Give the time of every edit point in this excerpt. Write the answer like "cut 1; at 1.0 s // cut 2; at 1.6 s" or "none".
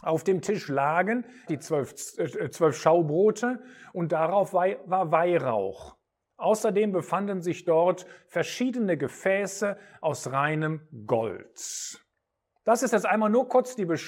cut 1; at 1.5 s